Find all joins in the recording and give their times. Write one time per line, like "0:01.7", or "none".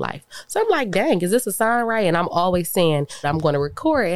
0:03.2